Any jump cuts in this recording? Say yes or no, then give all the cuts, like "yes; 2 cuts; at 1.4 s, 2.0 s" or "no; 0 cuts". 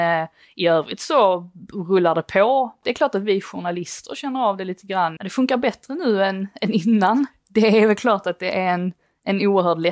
yes; 2 cuts; at 2.8 s, 5.2 s